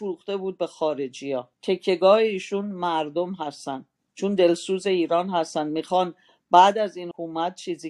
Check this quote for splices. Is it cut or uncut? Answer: cut